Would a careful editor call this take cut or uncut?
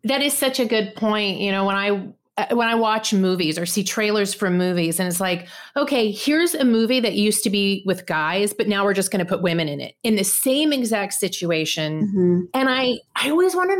cut